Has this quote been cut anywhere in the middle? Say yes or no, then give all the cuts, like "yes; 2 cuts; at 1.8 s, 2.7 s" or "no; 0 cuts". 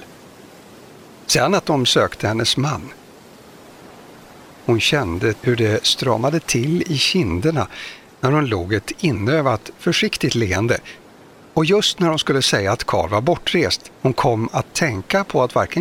yes; 1 cut; at 14.0 s